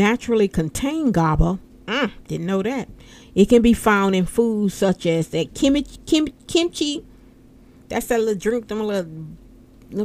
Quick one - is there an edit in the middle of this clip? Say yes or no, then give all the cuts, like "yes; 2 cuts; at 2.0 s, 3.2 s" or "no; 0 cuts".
no; 0 cuts